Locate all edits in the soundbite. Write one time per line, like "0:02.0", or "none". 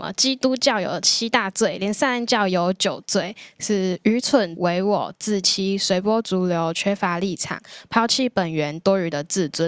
0:04.6